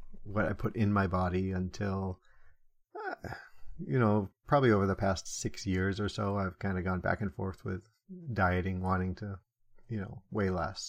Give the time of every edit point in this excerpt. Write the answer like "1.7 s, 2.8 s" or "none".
none